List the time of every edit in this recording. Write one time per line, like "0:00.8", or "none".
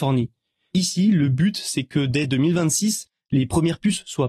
none